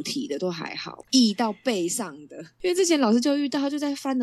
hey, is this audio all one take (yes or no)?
no